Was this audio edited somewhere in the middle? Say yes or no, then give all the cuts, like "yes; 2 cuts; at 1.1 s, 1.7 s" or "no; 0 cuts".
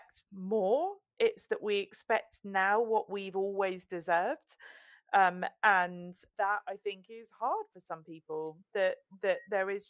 no; 0 cuts